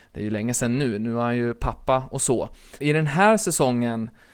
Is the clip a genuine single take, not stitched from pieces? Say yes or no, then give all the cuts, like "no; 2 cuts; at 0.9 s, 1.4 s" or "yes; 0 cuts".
no; 1 cut; at 2.8 s